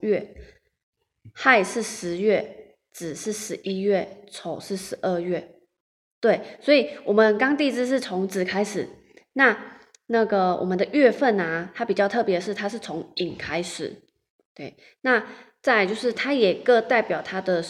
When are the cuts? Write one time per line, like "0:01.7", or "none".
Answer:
none